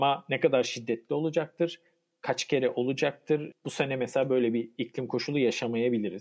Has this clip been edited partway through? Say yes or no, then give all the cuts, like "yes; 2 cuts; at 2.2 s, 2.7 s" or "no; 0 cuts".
yes; 1 cut; at 3.5 s